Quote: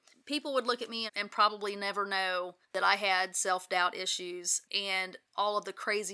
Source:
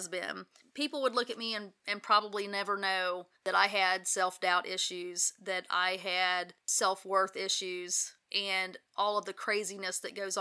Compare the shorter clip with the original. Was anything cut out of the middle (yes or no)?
yes